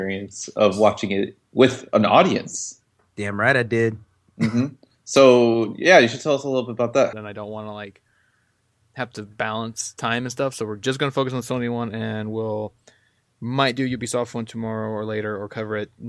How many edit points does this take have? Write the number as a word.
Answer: one